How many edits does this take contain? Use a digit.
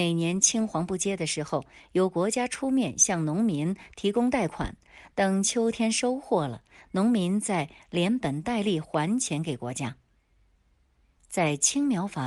0